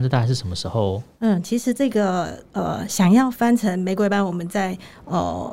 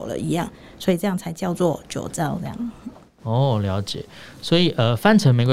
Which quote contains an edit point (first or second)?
first